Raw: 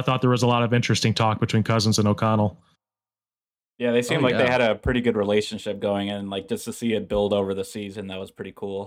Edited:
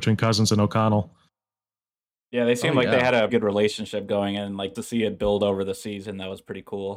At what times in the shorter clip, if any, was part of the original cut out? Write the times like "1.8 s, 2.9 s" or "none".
3.3 s, 4.7 s